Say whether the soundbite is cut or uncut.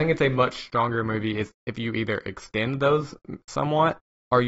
uncut